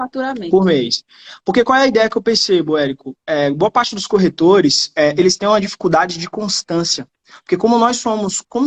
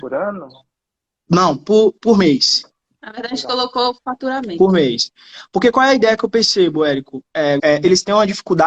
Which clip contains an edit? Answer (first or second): second